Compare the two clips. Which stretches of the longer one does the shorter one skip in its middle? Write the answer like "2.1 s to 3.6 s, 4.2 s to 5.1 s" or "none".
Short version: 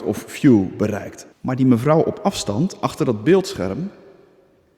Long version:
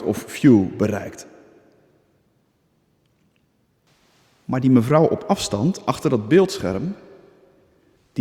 1.3 s to 4.4 s